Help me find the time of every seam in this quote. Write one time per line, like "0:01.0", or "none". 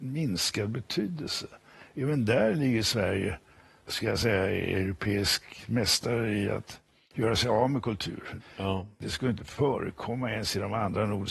0:08.4